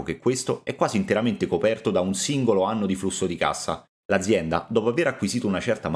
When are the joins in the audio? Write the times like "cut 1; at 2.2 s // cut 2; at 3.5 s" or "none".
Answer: cut 1; at 4.0 s